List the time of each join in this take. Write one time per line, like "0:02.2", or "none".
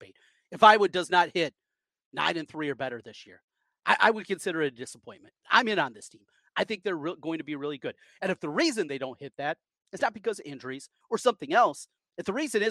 0:05.4
0:11.0